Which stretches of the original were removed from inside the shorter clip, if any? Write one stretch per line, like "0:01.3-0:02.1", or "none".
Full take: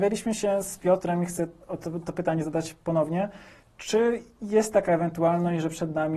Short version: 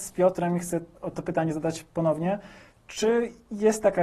0:01.8-0:02.0